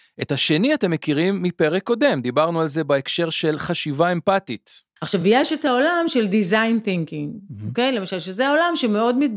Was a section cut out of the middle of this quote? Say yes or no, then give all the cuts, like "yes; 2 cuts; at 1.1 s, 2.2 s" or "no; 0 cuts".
no; 0 cuts